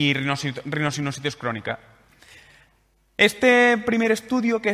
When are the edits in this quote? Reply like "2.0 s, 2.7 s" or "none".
none